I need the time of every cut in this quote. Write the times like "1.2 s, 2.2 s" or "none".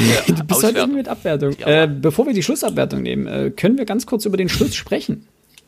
1.5 s